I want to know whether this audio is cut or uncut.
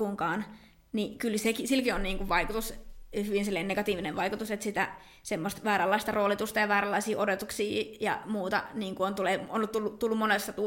uncut